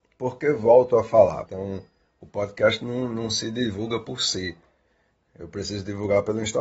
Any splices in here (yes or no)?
yes